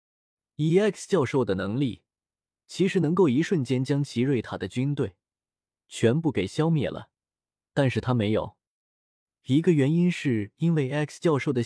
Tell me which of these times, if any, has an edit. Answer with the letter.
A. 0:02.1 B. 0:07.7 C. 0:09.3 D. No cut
D